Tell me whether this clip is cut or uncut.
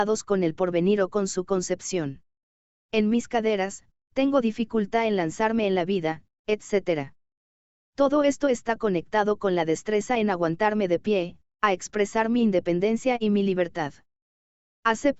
cut